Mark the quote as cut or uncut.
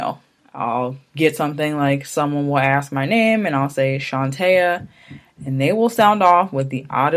uncut